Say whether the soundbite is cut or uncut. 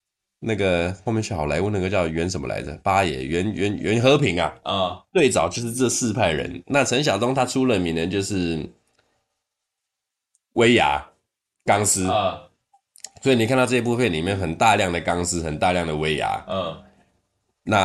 uncut